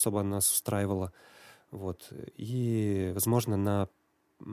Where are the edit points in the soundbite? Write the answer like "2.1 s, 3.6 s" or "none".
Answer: none